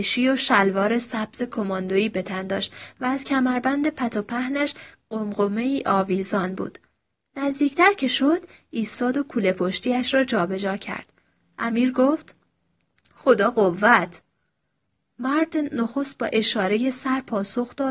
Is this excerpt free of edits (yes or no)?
yes